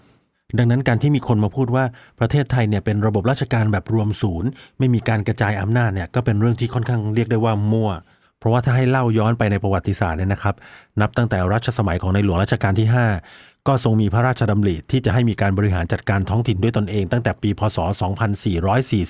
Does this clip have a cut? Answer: no; 0 cuts

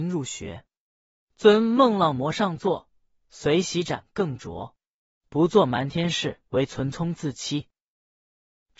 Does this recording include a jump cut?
yes; 2 cuts; at 5.2 s, 6.5 s

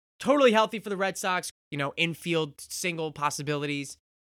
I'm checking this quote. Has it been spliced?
yes; 1 cut; at 1.5 s

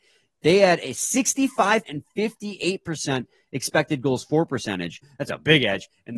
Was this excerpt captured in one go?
no; 2 cuts; at 1.8 s, 5.0 s

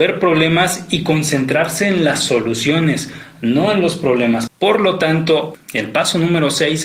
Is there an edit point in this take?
yes; 1 cut; at 4.5 s

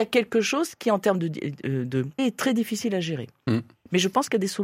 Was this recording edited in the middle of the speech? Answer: yes; 1 cut; at 2.2 s

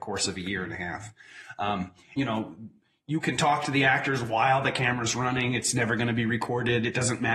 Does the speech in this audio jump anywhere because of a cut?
yes; 1 cut; at 2.2 s

